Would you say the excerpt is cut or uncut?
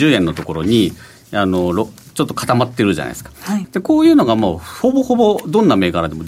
cut